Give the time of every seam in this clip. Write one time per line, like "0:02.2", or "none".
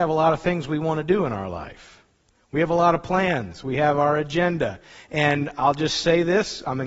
none